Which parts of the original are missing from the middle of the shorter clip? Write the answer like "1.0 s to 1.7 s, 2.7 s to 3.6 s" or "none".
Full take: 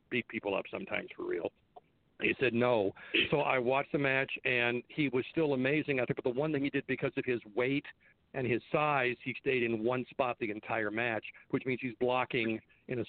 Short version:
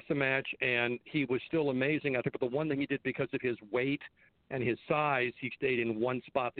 none